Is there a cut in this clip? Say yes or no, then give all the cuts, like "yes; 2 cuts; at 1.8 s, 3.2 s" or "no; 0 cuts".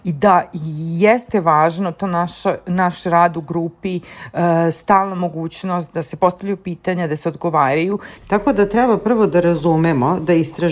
yes; 1 cut; at 8.2 s